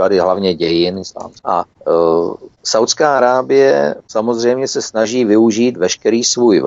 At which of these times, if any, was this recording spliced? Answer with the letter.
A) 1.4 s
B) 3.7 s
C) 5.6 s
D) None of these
A